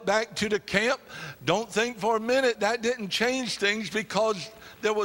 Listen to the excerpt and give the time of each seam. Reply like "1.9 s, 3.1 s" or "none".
2.6 s